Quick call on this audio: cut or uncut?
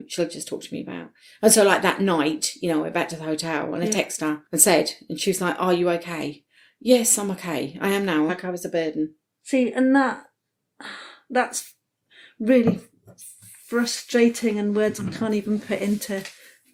cut